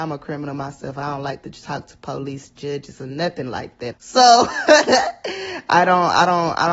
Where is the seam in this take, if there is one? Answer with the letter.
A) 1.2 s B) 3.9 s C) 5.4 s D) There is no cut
B